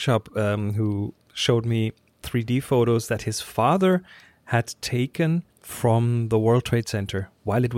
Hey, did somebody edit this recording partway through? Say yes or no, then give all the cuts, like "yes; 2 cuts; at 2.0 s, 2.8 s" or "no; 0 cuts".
yes; 1 cut; at 5.5 s